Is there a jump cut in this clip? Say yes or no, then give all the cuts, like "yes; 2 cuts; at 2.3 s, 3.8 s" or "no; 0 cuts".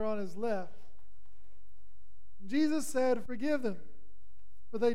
yes; 1 cut; at 3.3 s